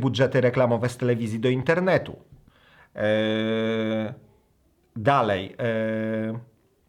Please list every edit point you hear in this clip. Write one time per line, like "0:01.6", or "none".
none